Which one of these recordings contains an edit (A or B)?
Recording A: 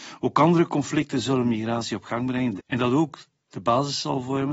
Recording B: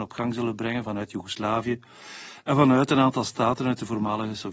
A